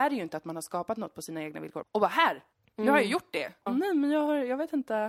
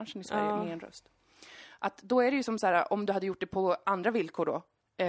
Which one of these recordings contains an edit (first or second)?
first